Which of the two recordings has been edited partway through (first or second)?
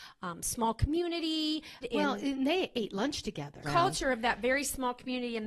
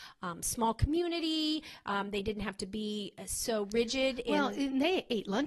first